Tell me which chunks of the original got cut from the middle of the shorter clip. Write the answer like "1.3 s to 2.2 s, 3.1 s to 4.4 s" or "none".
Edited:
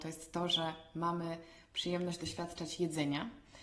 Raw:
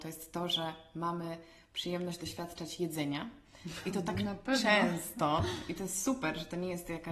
none